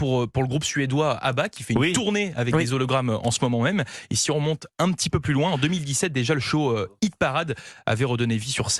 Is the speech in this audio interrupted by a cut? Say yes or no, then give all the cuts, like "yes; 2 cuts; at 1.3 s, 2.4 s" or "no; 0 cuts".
no; 0 cuts